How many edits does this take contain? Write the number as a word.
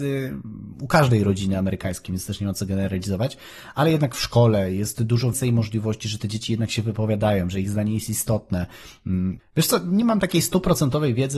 two